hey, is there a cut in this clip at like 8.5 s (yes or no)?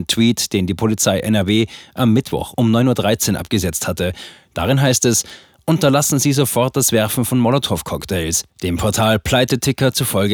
yes